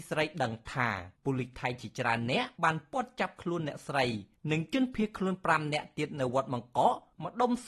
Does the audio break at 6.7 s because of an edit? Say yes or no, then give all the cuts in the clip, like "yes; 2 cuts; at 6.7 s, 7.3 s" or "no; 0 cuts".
no; 1 cut; at 2.5 s